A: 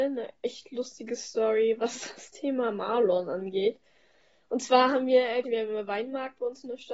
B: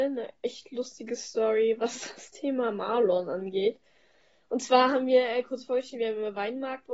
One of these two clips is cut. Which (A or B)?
A